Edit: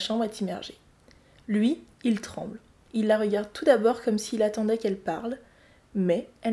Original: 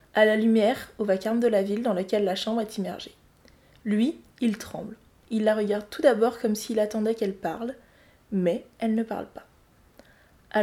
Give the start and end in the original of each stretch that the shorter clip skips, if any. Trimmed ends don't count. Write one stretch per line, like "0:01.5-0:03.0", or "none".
none